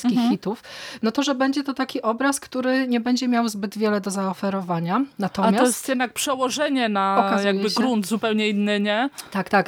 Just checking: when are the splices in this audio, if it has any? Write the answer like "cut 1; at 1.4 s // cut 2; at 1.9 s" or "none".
none